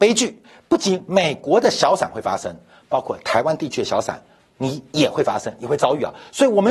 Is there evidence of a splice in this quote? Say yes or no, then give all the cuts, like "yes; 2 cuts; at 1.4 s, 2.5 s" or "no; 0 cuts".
no; 0 cuts